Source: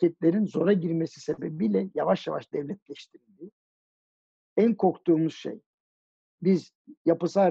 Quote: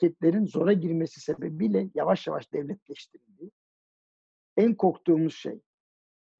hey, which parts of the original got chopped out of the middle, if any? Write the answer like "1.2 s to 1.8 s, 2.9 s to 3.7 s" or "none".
none